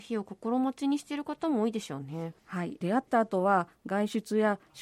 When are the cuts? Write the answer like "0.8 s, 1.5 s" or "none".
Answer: 2.4 s